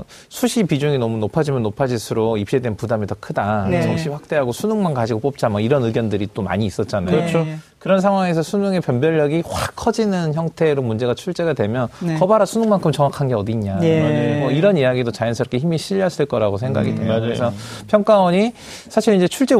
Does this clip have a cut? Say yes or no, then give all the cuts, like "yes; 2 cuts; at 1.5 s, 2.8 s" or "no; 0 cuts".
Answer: no; 0 cuts